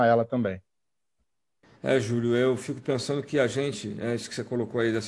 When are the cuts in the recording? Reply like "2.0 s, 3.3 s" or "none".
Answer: none